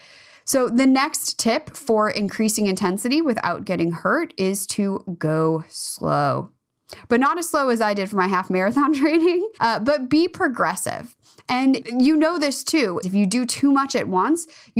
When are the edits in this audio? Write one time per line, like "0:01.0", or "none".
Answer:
0:09.6
0:13.0